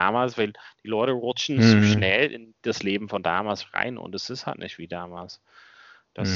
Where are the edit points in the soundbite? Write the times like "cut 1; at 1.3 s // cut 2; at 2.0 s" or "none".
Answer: none